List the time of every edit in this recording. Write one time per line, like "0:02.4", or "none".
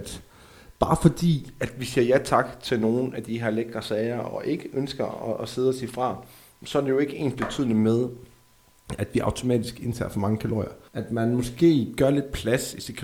0:10.9